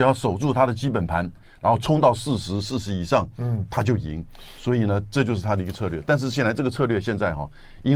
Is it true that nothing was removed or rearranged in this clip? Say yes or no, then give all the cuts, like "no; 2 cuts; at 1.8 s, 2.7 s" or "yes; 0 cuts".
no; 1 cut; at 1.4 s